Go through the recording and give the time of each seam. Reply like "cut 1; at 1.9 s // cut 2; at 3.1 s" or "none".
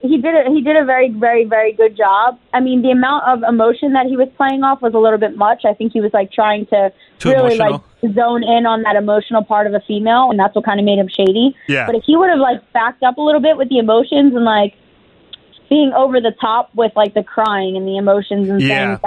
cut 1; at 10.3 s